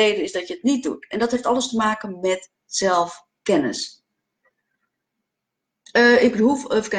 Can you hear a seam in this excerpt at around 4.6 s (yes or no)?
no